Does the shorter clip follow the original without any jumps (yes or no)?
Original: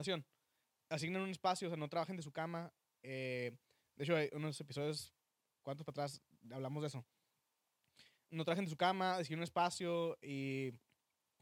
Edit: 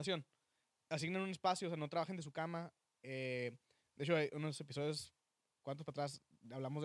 yes